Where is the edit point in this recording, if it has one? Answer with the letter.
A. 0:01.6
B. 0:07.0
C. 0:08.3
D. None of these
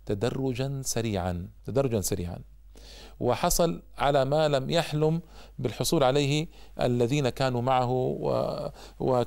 A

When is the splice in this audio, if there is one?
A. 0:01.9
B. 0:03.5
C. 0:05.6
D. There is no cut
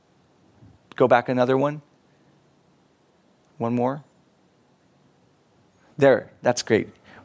D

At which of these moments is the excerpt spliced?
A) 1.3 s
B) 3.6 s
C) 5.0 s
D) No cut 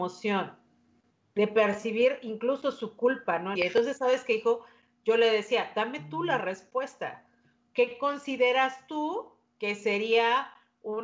B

